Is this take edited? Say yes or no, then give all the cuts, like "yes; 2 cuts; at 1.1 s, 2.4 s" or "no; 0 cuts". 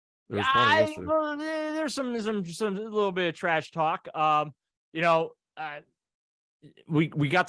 no; 0 cuts